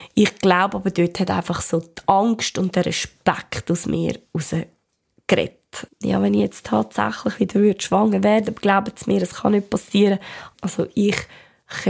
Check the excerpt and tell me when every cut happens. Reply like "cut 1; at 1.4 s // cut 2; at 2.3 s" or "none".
cut 1; at 5.9 s // cut 2; at 10.5 s